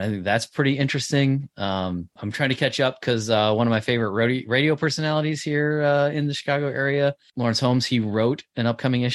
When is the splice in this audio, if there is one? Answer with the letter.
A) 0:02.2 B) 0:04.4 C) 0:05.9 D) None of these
A